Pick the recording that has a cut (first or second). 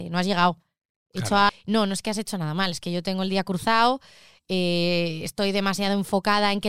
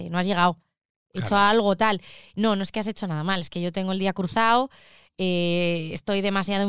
first